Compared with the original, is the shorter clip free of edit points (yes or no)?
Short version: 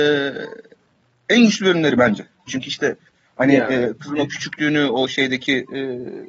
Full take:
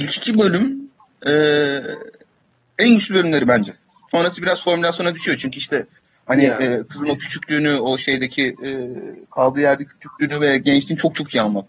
no